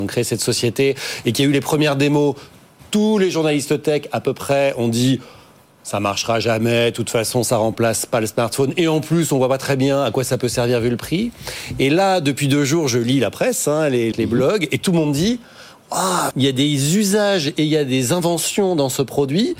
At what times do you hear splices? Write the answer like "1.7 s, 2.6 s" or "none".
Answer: 14.1 s, 16.3 s